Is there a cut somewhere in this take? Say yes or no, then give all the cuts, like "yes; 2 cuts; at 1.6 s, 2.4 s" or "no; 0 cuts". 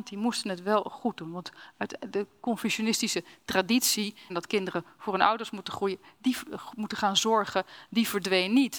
yes; 1 cut; at 4.3 s